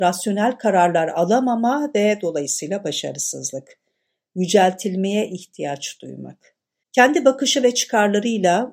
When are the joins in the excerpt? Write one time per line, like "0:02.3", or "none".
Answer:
none